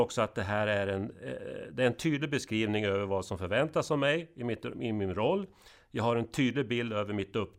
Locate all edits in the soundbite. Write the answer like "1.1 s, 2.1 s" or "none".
none